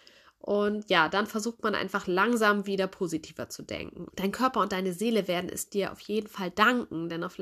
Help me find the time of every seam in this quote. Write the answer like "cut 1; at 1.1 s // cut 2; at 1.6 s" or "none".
cut 1; at 4.1 s

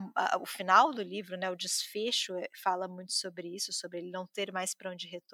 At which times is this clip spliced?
none

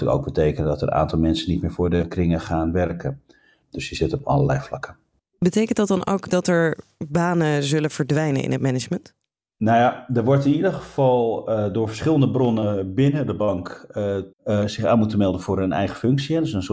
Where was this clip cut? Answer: cut 1; at 3.6 s // cut 2; at 14.3 s

